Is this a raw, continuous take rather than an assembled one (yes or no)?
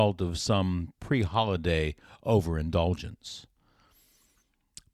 yes